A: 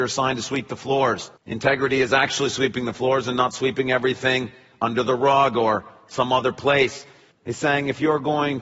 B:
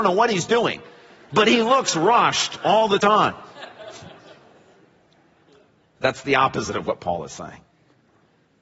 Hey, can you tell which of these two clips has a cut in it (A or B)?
A